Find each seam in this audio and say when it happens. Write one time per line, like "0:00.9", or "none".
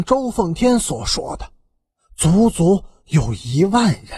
none

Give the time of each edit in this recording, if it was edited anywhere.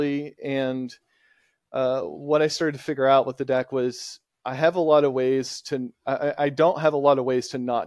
none

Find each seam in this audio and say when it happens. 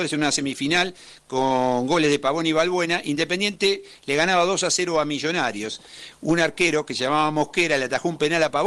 none

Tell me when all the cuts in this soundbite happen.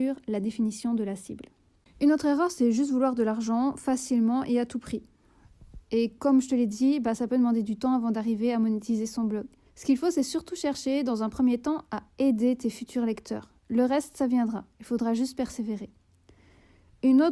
0:09.6

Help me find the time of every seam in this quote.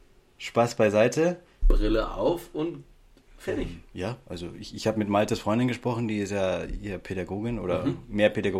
0:01.6

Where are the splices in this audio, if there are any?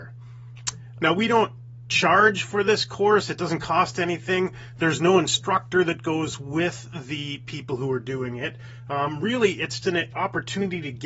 0:01.0
0:09.8

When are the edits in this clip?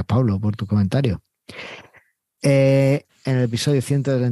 0:03.1

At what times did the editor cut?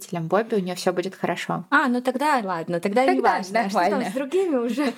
none

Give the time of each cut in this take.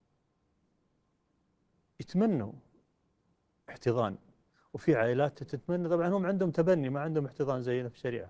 0:05.5

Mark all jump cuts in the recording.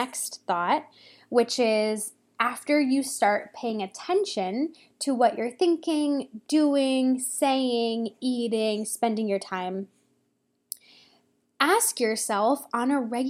none

